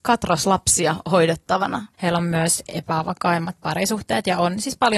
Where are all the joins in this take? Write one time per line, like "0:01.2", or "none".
0:01.9